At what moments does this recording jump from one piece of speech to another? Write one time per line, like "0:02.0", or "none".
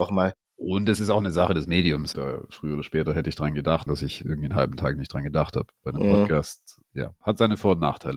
0:02.1
0:03.9